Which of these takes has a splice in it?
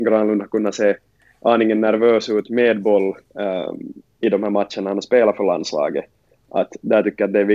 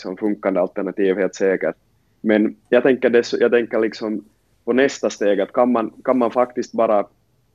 first; 1 cut; at 3.2 s

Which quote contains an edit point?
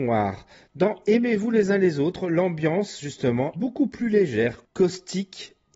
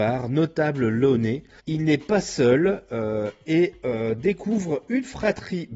first; 1 cut; at 3.5 s

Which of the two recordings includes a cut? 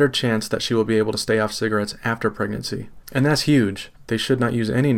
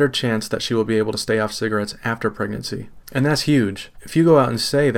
first; 1 cut; at 4.0 s

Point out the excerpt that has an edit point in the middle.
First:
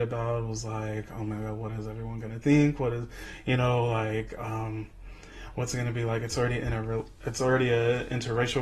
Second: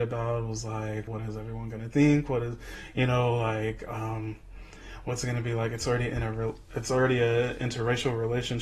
second; 1 cut; at 1.1 s

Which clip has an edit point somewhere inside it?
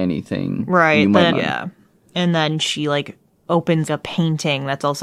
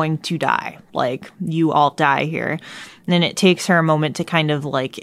first; 2 cuts; at 1.3 s, 3.8 s

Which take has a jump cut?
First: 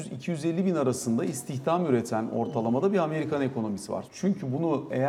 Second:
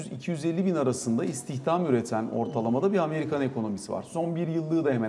first; 1 cut; at 4.0 s

